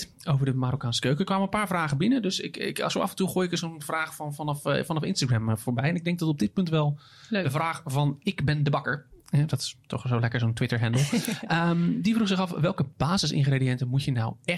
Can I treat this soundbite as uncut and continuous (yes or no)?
yes